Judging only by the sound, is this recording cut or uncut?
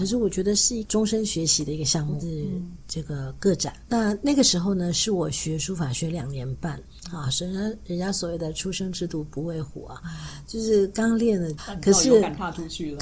cut